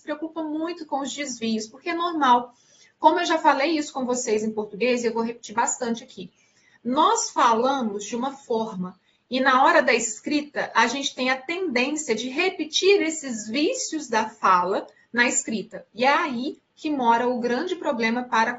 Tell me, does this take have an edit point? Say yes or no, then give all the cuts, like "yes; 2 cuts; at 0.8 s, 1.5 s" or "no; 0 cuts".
no; 0 cuts